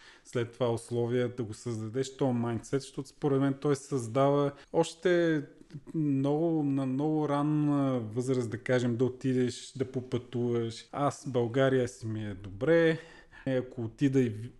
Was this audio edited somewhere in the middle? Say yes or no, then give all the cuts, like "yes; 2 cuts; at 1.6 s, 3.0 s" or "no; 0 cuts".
yes; 3 cuts; at 4.6 s, 10.9 s, 13.5 s